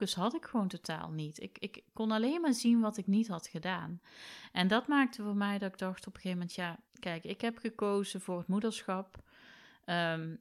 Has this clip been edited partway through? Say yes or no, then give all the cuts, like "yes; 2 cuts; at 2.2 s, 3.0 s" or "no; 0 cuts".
yes; 1 cut; at 6.9 s